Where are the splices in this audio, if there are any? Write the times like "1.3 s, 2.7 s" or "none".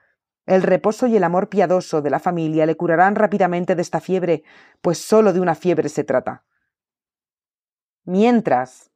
none